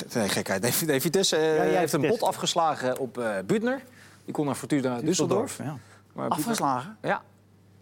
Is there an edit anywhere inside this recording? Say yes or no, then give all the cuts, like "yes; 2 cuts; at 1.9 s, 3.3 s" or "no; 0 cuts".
no; 0 cuts